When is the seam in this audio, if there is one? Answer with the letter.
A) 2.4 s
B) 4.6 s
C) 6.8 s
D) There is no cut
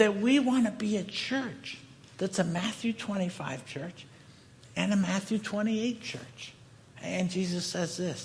C